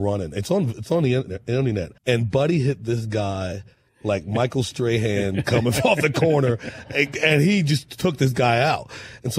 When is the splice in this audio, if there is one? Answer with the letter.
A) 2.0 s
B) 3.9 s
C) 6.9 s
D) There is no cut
A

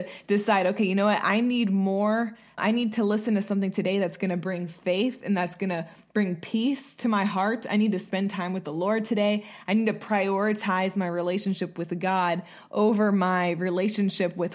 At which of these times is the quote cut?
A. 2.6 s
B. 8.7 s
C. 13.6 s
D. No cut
A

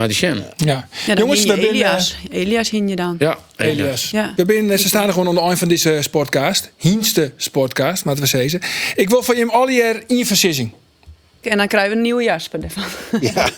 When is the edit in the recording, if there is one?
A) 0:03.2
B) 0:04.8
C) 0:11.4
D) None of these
C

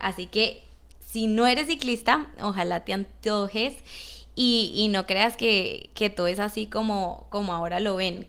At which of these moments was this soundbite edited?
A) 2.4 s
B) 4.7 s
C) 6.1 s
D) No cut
D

